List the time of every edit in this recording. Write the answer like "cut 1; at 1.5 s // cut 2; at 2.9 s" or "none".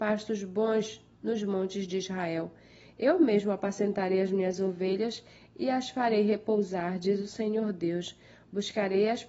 none